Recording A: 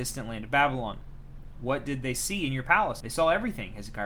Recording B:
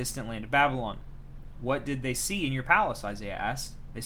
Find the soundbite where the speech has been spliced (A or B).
A